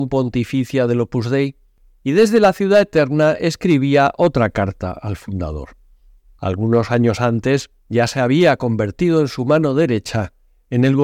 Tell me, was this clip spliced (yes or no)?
yes